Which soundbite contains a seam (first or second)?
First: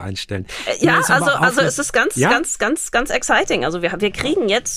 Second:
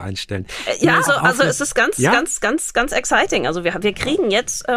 second